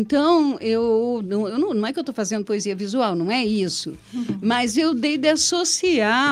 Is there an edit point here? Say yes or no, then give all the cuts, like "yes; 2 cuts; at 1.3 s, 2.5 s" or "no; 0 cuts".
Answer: no; 0 cuts